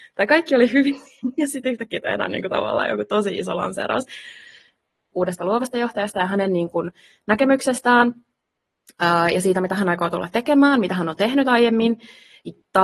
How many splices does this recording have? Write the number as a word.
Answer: one